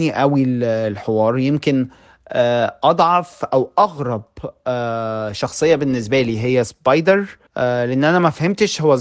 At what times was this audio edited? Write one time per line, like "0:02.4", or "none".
0:07.5